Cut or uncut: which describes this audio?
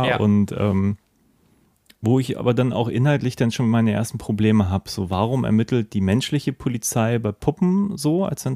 uncut